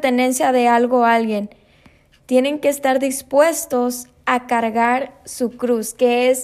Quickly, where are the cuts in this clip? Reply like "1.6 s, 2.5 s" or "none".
2.2 s